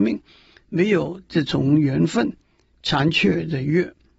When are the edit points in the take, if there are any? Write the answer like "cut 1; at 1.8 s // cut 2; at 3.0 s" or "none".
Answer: cut 1; at 2.7 s

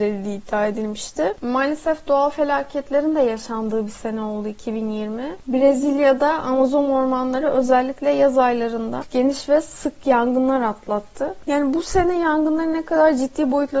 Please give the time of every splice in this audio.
cut 1; at 1.4 s

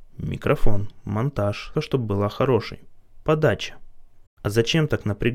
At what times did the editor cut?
cut 1; at 1.7 s // cut 2; at 4.3 s

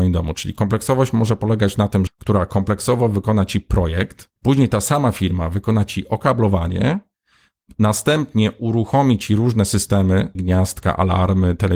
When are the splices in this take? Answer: cut 1; at 2.1 s // cut 2; at 4.4 s // cut 3; at 10.3 s

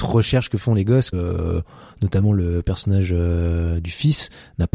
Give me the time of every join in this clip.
cut 1; at 1.1 s

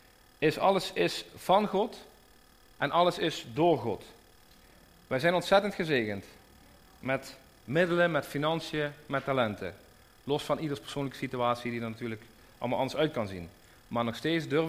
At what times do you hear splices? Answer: none

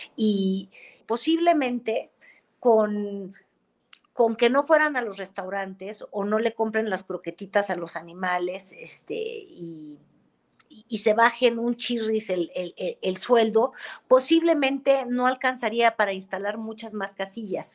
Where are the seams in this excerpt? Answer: cut 1; at 1.0 s

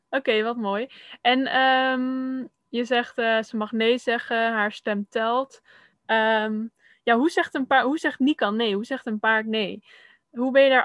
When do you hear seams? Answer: cut 1; at 5.9 s

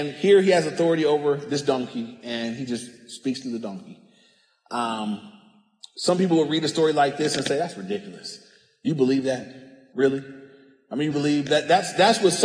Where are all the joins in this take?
cut 1; at 9.9 s // cut 2; at 11.1 s

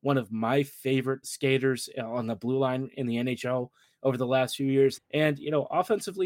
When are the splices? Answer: cut 1; at 1.2 s // cut 2; at 5.0 s

